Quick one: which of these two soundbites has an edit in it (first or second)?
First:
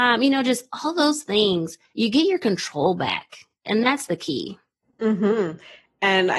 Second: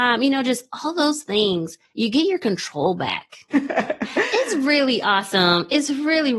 second